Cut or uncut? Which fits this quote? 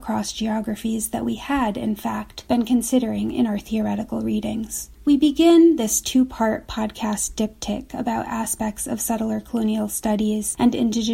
uncut